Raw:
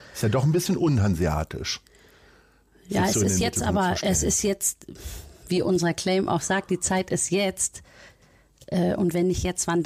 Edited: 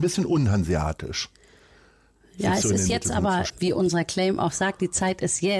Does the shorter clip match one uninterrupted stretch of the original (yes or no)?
no